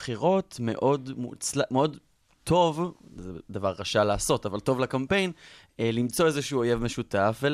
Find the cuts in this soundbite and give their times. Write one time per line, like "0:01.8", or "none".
none